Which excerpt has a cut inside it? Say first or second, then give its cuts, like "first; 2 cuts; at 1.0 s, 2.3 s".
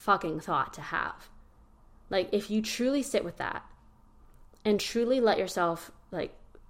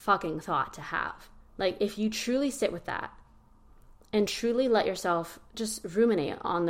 second; 2 cuts; at 1.5 s, 5.5 s